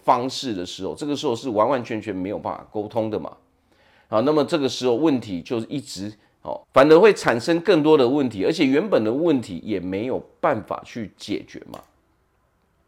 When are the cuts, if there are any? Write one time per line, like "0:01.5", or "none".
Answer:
0:06.6